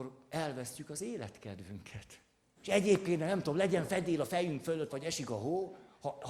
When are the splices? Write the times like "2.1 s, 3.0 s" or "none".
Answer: 2.6 s, 4.9 s